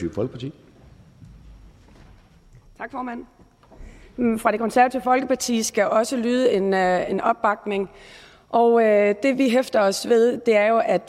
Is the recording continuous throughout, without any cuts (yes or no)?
yes